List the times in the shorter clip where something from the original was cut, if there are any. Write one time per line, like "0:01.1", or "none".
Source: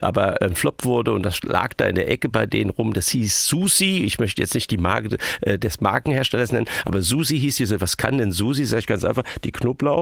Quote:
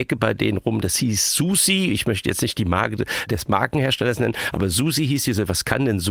0:03.3